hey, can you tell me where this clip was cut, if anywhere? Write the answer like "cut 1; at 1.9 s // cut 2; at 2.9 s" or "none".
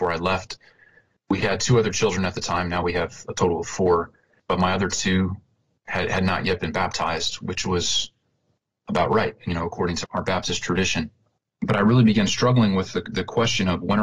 cut 1; at 10.0 s

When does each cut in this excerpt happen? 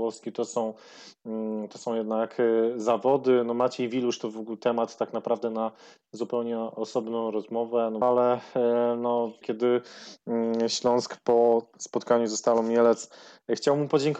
cut 1; at 8.0 s // cut 2; at 9.4 s

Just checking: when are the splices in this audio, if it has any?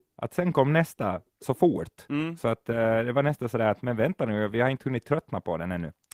none

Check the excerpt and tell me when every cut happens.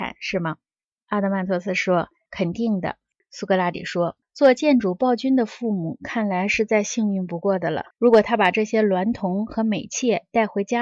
cut 1; at 3.1 s // cut 2; at 7.9 s

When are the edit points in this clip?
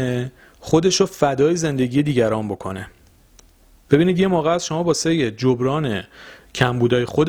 none

